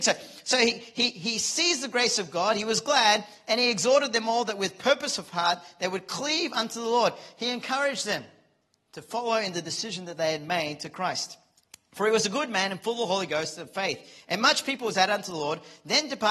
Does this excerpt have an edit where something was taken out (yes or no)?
no